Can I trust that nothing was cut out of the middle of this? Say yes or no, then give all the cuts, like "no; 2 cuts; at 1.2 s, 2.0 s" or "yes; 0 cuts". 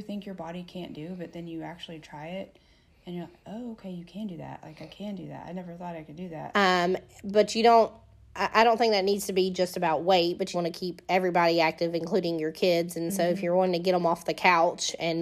no; 2 cuts; at 6.5 s, 10.5 s